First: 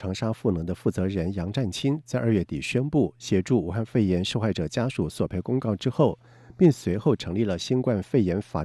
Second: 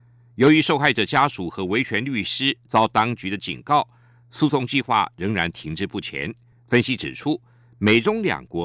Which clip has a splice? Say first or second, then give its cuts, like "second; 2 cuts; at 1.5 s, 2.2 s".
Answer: second; 1 cut; at 6.5 s